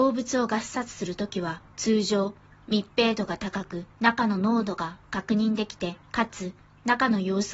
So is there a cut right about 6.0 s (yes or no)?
yes